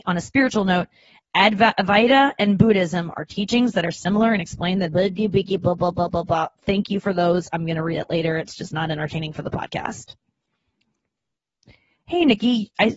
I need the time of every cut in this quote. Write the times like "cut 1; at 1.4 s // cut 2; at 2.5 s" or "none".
none